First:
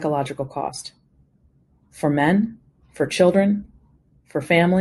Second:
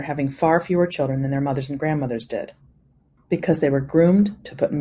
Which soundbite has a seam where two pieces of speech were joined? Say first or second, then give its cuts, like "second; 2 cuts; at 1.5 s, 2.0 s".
second; 1 cut; at 3.2 s